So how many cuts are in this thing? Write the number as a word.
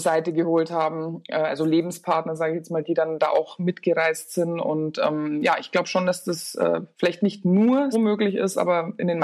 two